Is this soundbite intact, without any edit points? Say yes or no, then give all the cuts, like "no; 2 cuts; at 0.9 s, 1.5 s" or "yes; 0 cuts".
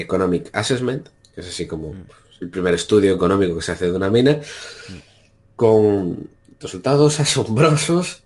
yes; 0 cuts